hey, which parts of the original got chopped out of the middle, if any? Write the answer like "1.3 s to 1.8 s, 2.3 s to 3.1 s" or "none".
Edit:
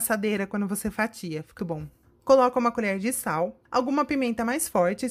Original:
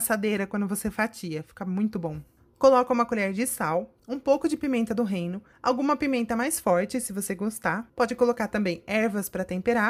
1.6 s to 1.9 s, 4.0 s to 5.6 s